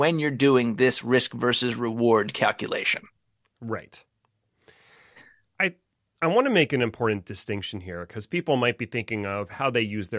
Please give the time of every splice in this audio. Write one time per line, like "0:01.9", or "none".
none